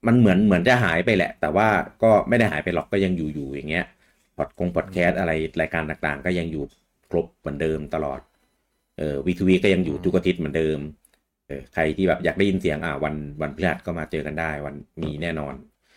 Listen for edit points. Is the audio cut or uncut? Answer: cut